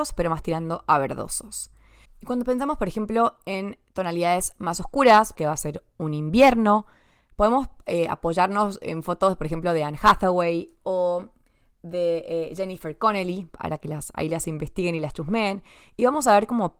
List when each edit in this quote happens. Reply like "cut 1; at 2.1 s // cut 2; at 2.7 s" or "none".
cut 1; at 5.3 s